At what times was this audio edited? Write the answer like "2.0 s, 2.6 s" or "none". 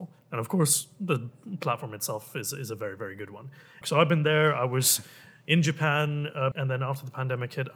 3.8 s, 6.5 s